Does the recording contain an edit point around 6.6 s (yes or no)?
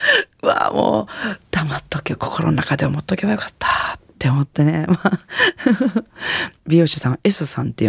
yes